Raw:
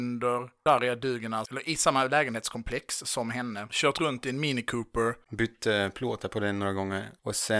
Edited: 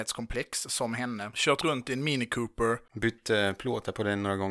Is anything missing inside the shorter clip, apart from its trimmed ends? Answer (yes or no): no